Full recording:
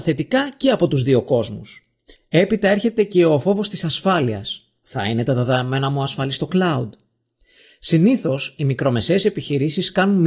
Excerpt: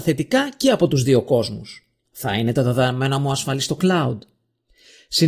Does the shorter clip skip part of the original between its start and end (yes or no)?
yes